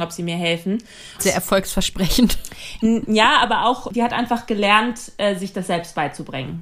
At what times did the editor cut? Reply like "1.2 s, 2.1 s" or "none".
1.2 s